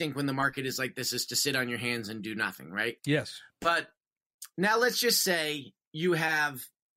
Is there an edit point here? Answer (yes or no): no